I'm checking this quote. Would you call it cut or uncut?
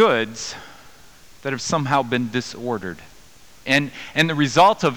cut